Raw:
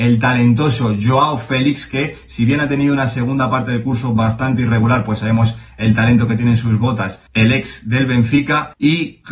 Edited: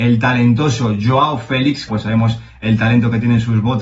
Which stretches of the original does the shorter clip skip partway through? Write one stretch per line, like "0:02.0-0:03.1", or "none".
0:01.9-0:05.0